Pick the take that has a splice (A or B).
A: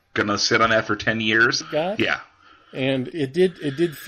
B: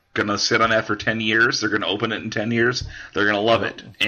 A